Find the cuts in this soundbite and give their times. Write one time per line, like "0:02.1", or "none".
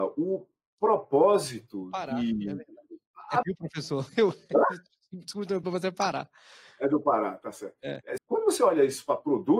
0:03.4
0:05.6
0:08.2